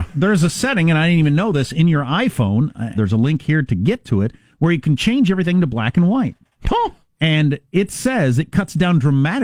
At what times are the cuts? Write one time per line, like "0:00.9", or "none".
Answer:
0:02.9